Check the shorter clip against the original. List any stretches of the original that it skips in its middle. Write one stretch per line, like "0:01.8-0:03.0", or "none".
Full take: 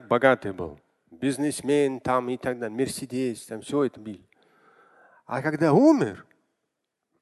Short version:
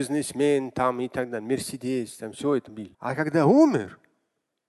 0:04.2-0:05.2